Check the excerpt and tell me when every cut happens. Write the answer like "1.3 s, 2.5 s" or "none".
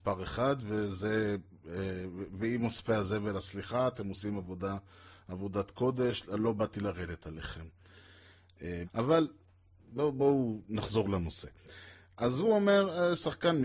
8.8 s